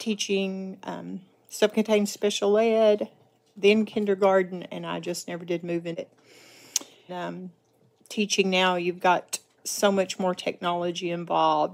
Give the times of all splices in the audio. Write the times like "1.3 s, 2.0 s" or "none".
7.1 s